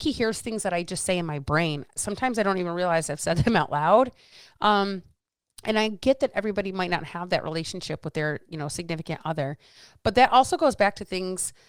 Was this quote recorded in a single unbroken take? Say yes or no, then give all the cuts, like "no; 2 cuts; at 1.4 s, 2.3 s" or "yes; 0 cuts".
yes; 0 cuts